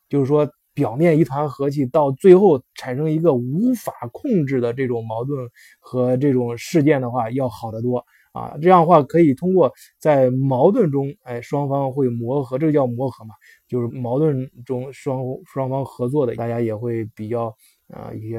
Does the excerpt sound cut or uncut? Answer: cut